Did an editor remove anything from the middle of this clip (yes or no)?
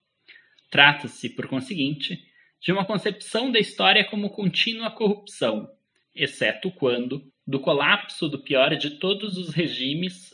yes